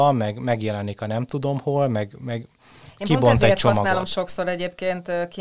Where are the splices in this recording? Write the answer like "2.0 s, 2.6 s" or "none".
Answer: none